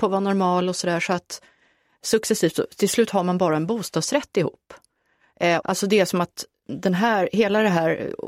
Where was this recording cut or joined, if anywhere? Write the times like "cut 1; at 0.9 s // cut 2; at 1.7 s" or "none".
cut 1; at 5.6 s